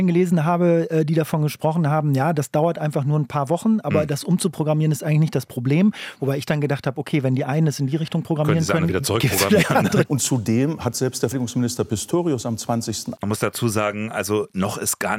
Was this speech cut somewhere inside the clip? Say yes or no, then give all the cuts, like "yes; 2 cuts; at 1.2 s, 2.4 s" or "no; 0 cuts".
yes; 3 cuts; at 10.0 s, 11.3 s, 13.2 s